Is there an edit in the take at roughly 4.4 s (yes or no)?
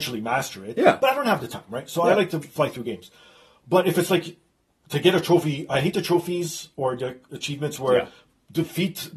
no